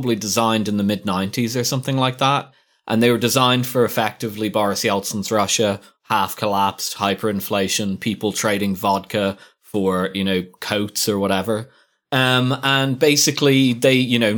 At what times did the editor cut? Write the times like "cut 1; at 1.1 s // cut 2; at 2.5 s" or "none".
none